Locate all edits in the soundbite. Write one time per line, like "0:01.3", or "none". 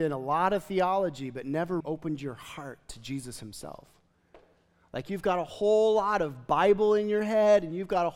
0:01.8